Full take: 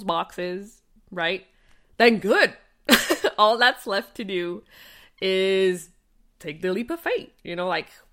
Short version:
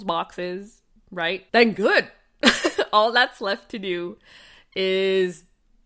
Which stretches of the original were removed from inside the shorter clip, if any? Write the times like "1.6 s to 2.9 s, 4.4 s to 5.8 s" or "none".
1.5 s to 1.9 s